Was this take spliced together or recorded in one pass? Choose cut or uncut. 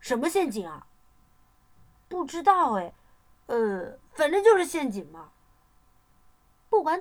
uncut